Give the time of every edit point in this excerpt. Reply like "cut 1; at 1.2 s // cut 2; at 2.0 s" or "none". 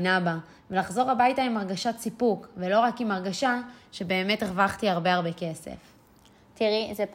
none